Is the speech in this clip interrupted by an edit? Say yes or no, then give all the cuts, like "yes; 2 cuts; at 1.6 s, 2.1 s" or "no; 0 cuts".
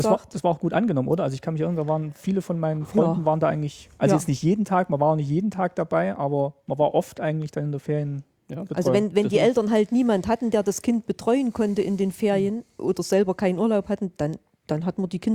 no; 0 cuts